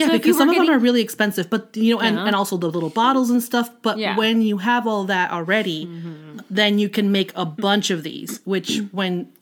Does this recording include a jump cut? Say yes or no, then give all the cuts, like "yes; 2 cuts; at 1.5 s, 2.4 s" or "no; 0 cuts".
no; 0 cuts